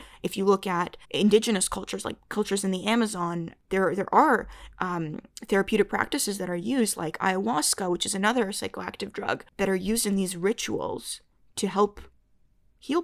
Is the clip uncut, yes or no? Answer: no